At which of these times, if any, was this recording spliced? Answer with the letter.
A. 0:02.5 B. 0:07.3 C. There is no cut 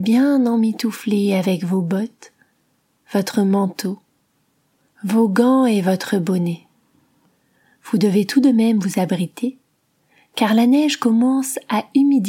C